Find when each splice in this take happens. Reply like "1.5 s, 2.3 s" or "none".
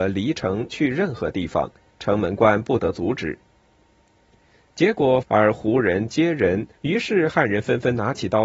5.2 s, 6.8 s